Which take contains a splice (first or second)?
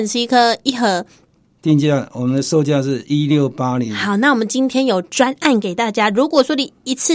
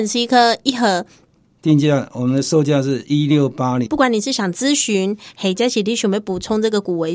second